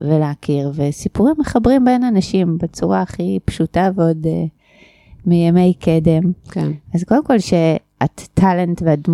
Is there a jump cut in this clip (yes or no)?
no